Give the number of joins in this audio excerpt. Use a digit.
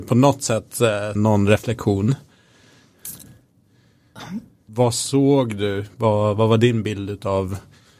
2